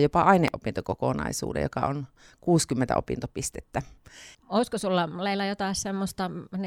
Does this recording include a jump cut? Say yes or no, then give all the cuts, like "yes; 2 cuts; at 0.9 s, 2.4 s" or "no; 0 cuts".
yes; 1 cut; at 4.3 s